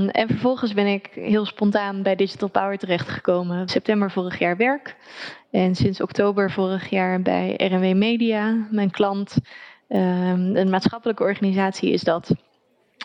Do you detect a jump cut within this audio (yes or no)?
yes